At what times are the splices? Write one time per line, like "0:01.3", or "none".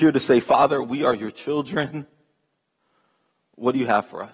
none

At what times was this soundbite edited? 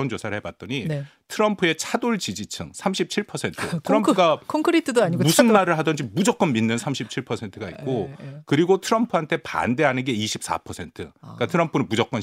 none

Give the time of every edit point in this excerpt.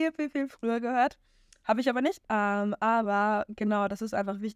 0:02.2

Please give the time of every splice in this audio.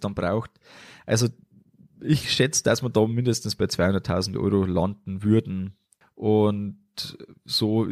0:06.0

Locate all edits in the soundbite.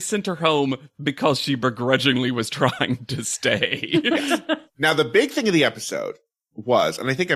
none

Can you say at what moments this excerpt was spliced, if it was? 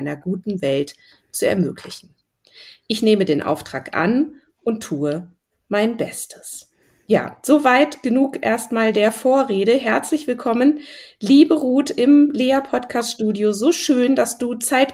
none

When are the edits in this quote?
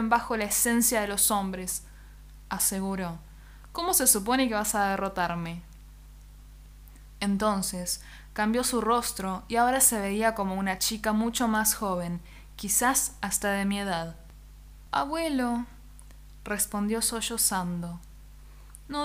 none

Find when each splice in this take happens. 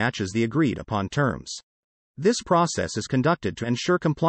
none

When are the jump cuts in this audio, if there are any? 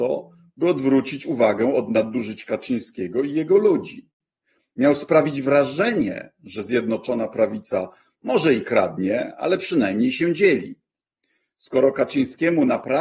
none

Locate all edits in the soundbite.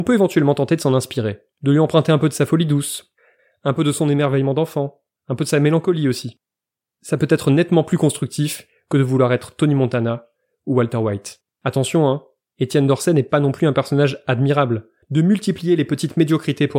0:01.5
0:11.5
0:15.0

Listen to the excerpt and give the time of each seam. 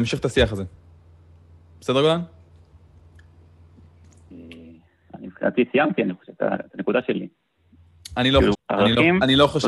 0:08.5

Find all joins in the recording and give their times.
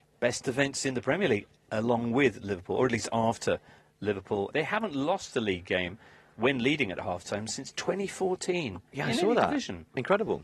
0:04.5

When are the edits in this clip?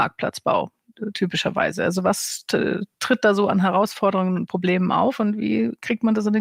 none

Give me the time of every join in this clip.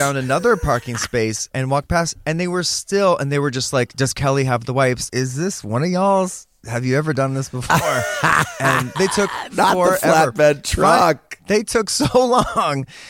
0:01.5
0:05.1
0:09.0

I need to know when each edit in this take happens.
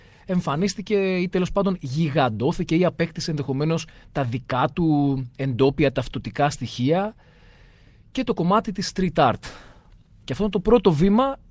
0:10.2

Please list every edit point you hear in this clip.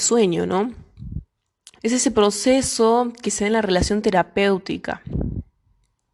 0:01.8

